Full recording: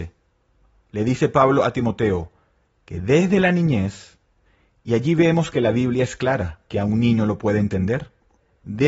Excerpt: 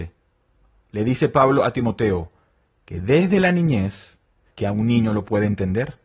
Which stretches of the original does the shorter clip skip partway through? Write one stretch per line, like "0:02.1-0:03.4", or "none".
0:04.5-0:06.6